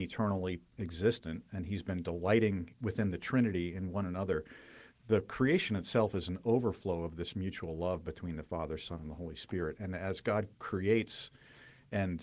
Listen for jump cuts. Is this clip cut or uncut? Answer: cut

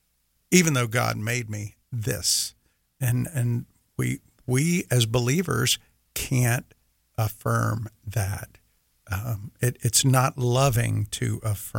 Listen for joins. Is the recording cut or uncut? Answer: uncut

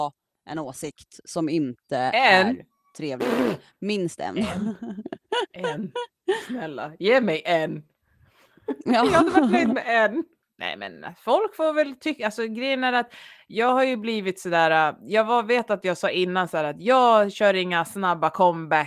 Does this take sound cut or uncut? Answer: uncut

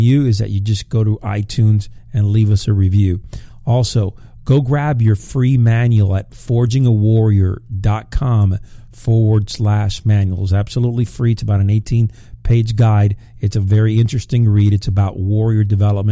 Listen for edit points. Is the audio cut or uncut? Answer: uncut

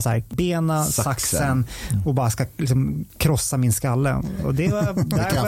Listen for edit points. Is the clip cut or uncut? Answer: uncut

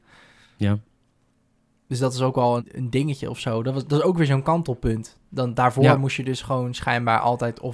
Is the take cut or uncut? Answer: cut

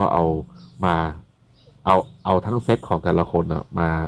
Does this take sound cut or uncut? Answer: uncut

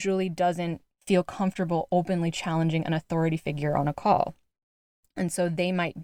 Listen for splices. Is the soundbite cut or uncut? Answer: uncut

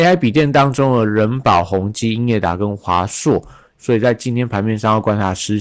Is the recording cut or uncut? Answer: cut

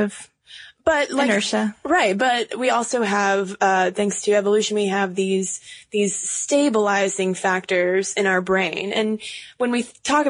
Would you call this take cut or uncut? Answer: uncut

